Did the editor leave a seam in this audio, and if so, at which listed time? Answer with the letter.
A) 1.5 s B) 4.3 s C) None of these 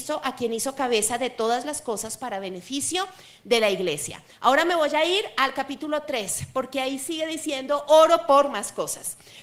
C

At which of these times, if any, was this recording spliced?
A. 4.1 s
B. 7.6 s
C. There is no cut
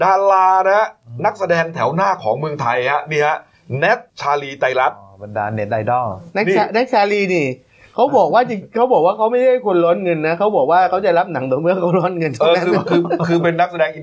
A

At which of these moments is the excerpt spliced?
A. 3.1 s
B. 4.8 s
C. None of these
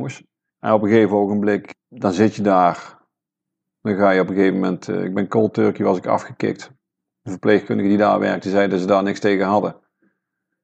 C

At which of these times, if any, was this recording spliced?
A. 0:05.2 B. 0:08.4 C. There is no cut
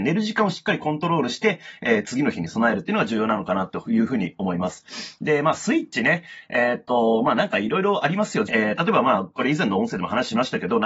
B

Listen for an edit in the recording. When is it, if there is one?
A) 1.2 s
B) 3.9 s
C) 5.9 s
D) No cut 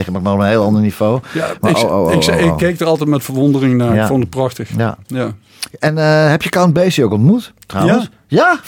D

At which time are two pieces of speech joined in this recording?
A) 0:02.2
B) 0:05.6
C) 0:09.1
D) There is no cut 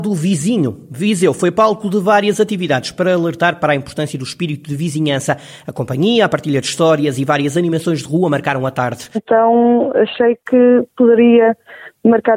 C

